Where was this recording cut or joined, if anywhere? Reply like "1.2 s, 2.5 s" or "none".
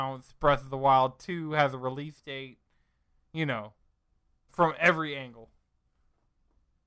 4.5 s